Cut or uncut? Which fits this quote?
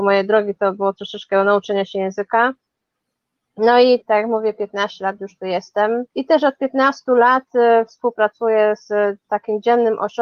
cut